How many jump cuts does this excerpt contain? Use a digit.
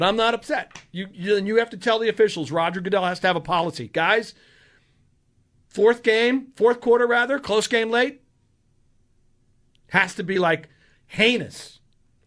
0